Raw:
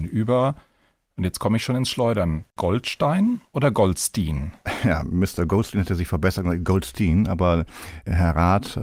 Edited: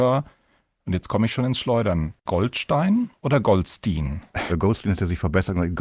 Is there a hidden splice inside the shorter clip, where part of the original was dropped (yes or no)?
yes